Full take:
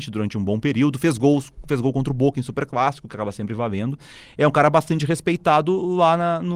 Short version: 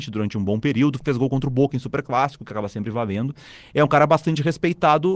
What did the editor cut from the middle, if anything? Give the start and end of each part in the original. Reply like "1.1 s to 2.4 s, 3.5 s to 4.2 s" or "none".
1.0 s to 1.6 s